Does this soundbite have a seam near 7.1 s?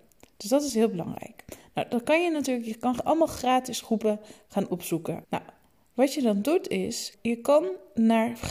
yes; 2 cuts; at 5.2 s, 7.1 s

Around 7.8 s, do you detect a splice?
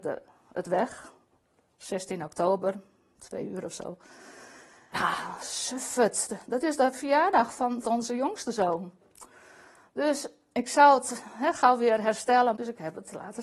yes; 3 cuts; at 4.9 s, 7.8 s, 12.5 s

